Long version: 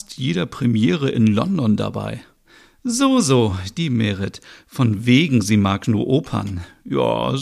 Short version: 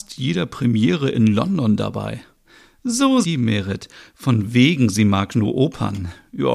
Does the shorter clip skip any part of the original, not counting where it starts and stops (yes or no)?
yes